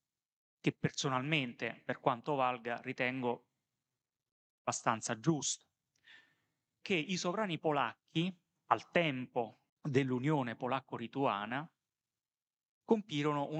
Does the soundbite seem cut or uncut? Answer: cut